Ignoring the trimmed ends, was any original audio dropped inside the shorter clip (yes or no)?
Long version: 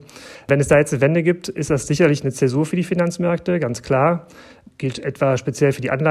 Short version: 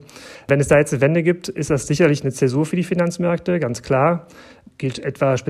no